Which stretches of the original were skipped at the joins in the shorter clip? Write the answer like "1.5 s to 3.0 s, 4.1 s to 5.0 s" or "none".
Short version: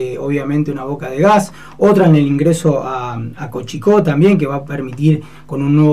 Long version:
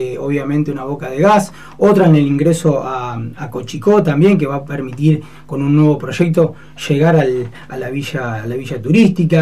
none